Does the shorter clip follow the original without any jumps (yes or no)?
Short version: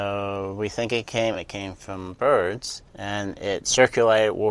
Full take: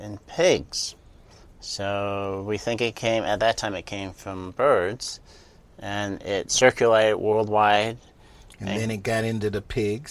no